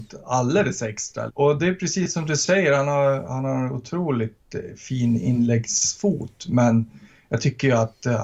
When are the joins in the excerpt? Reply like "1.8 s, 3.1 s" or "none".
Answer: 1.3 s